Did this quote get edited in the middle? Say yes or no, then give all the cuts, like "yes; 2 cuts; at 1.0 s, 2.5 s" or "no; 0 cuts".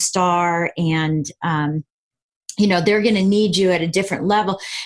no; 0 cuts